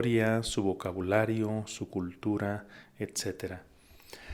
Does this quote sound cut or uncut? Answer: uncut